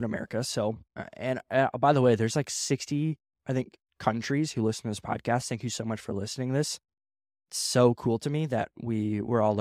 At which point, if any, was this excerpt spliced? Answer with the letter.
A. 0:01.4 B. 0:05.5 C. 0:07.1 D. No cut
D